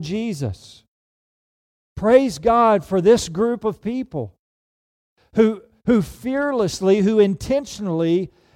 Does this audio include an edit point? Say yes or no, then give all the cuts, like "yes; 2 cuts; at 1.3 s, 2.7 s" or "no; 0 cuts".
no; 0 cuts